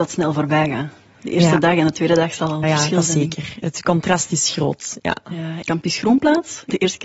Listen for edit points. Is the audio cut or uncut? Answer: cut